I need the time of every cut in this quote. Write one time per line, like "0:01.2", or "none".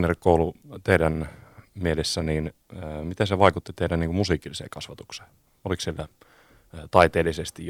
none